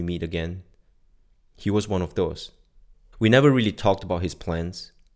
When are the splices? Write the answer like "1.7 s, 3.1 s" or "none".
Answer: 3.1 s